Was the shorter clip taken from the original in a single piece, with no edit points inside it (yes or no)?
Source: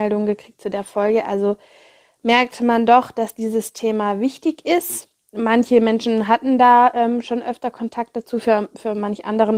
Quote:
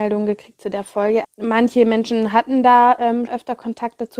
no